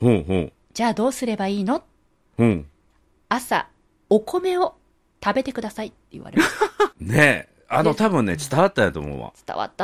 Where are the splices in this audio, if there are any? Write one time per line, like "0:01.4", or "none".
0:06.9